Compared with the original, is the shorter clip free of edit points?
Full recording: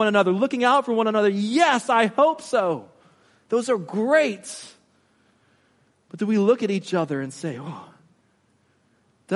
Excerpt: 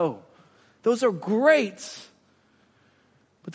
yes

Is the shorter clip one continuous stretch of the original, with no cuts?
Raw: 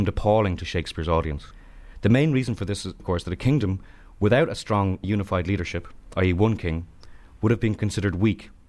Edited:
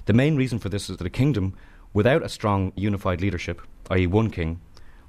no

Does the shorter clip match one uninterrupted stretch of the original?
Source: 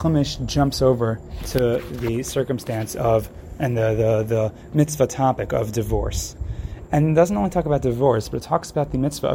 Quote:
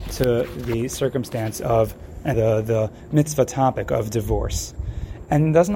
no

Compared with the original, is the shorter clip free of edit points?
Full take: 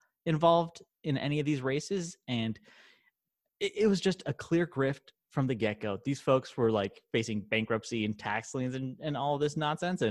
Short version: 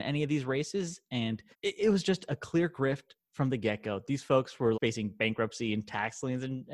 no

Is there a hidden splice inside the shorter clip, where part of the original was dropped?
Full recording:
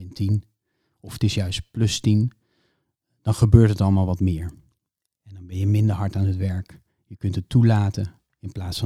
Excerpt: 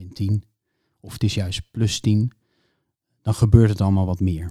no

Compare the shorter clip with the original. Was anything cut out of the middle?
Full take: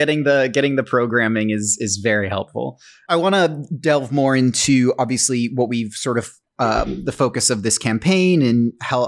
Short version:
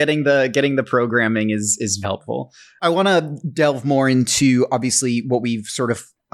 yes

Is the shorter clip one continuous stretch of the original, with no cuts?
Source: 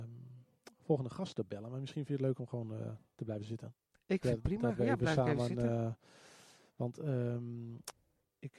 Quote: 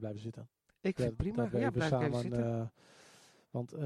yes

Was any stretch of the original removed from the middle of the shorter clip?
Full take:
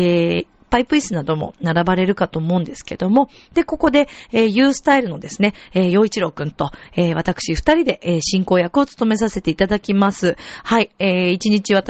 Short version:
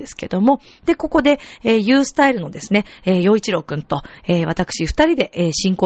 no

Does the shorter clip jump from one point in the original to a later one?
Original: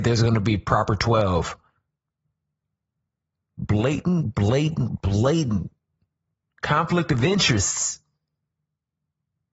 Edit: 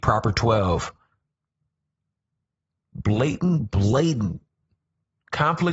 yes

